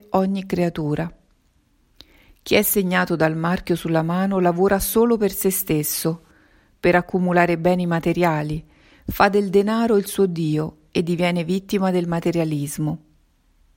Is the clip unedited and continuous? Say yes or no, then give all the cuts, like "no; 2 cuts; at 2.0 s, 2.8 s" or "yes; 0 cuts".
yes; 0 cuts